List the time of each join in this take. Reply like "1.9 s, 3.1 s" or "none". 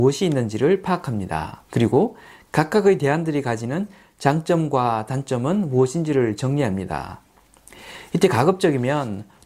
1.6 s

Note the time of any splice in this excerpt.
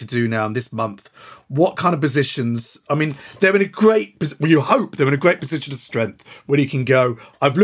none

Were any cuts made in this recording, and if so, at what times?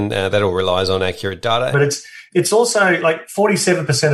1.7 s

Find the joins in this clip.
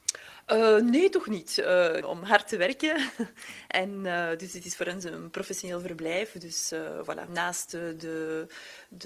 2.0 s

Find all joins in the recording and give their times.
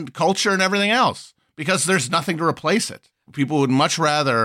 3.3 s

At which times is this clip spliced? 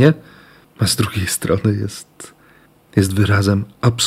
none

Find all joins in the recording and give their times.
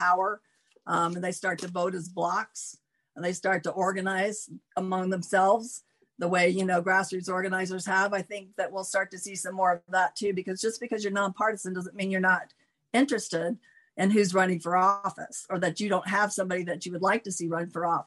none

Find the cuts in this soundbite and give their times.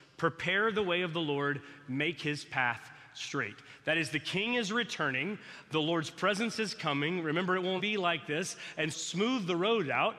7.8 s, 8.9 s

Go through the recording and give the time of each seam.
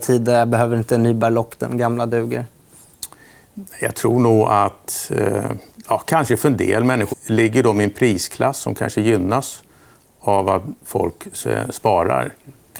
7.1 s

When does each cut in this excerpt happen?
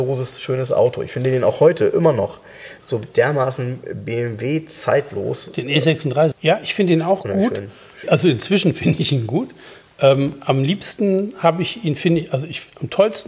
6.3 s

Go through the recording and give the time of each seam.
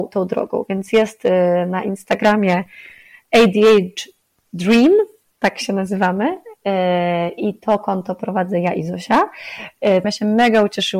10.0 s

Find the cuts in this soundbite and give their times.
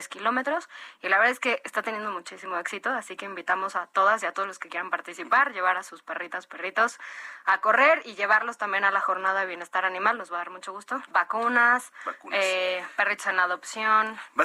11.1 s

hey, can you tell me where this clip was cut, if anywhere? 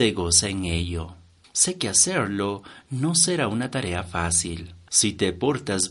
4.9 s

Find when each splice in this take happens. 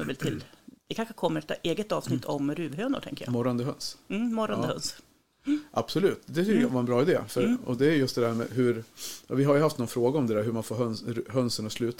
none

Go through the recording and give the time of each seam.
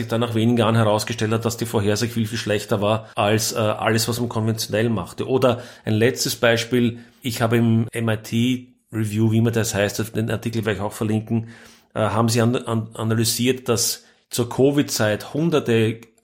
none

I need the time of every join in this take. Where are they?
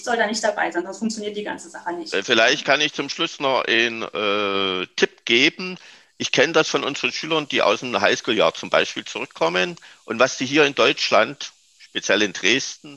none

